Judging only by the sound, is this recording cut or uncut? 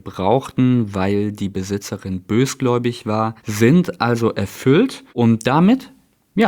cut